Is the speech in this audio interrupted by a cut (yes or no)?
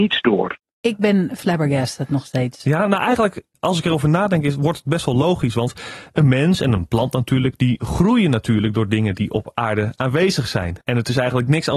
yes